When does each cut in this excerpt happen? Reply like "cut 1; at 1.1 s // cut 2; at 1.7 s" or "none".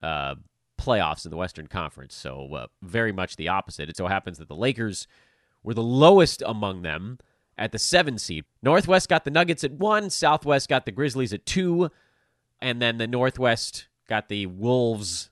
cut 1; at 3.9 s // cut 2; at 8.5 s // cut 3; at 12.6 s